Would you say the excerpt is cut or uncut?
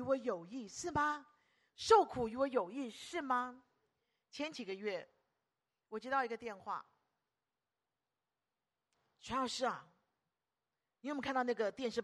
uncut